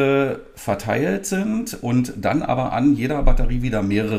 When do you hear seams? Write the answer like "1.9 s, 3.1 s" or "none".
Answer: none